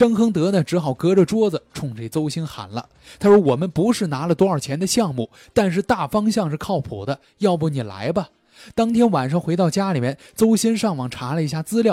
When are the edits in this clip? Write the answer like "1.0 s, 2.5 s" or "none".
none

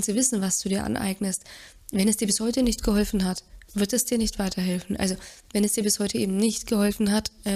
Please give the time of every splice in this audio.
none

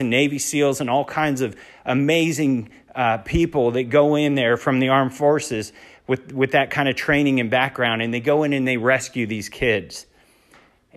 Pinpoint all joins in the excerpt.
none

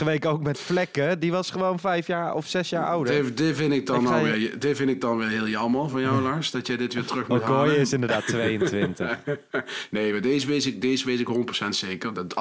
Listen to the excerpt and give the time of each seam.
none

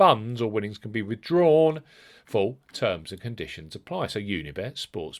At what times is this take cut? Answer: none

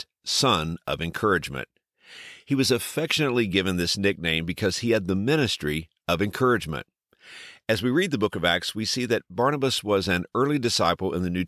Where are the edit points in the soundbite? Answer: none

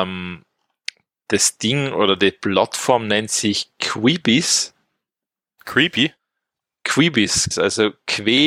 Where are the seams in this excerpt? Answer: 7.5 s

